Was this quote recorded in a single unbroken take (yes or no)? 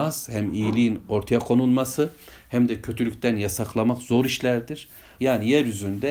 no